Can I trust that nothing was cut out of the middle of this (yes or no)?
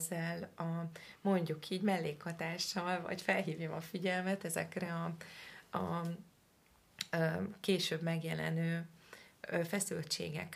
yes